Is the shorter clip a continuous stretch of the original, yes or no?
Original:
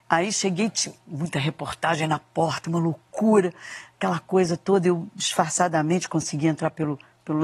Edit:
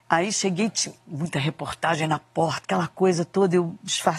no